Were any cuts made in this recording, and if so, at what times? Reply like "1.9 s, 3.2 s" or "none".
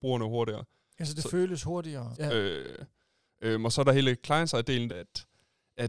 2.1 s, 4.9 s